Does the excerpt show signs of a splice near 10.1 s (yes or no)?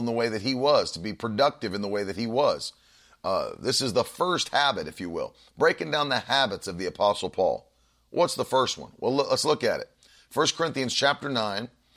no